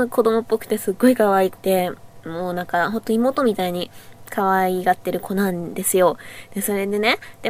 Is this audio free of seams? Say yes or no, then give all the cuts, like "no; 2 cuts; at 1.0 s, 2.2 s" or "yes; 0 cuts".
no; 1 cut; at 1.6 s